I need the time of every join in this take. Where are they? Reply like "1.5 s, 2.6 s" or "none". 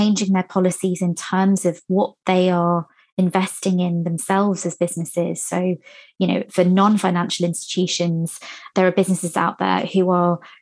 none